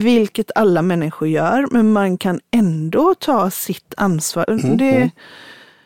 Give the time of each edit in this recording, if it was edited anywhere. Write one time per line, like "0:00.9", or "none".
0:04.5